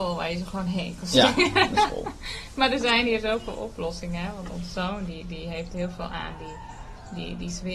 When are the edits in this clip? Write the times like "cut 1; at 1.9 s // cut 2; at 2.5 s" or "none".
none